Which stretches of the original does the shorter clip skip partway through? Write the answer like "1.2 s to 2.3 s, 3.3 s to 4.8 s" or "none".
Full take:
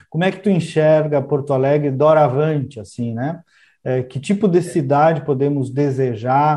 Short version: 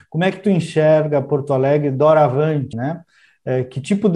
2.7 s to 3.1 s